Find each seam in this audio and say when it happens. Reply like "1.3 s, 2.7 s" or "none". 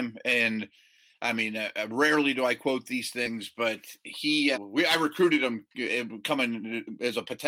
4.5 s